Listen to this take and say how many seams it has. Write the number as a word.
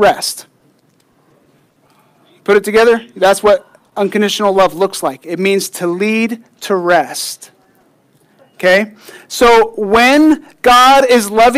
zero